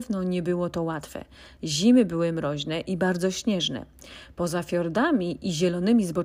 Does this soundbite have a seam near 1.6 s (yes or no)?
no